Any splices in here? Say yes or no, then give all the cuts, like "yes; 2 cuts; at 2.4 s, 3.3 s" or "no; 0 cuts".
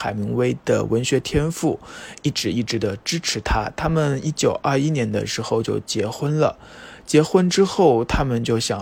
no; 0 cuts